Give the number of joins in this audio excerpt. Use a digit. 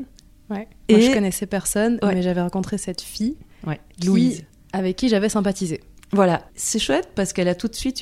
2